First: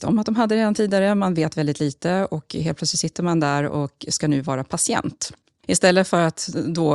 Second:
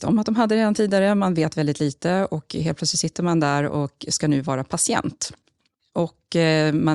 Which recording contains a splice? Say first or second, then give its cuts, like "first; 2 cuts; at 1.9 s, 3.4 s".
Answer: first; 1 cut; at 5.6 s